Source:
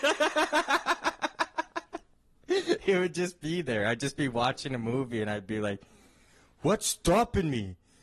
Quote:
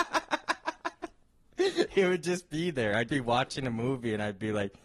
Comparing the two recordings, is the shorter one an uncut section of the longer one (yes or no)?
no